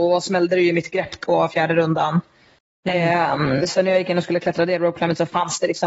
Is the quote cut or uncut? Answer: uncut